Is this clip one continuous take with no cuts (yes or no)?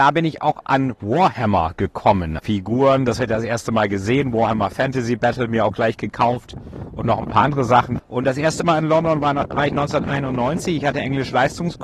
no